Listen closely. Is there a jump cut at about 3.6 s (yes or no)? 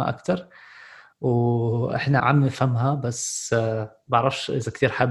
no